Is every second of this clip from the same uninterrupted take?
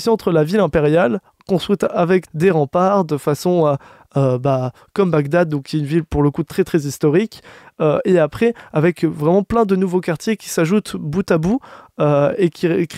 no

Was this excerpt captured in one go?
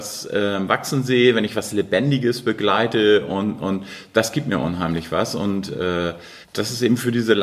no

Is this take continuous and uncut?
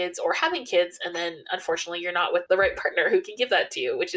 no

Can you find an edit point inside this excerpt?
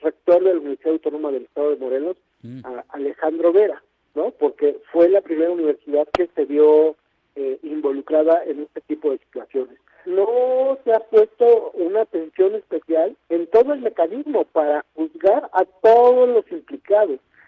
yes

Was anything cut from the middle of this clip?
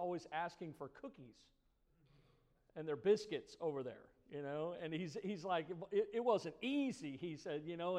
no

